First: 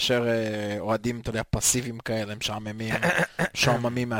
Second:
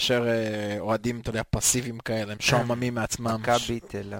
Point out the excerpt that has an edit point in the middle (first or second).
second